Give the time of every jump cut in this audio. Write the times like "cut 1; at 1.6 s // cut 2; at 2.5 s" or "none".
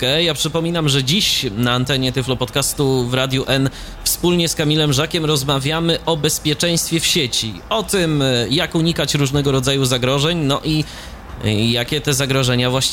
none